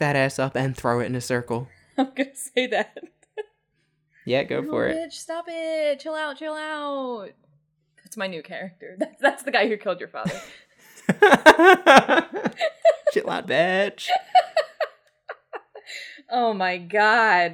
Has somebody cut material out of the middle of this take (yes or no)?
yes